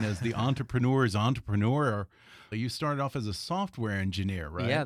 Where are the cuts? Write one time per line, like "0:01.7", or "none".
0:02.5